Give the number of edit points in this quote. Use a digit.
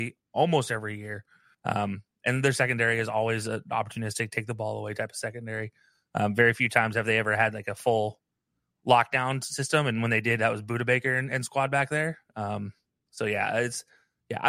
1